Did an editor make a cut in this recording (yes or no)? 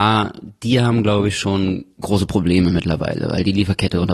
no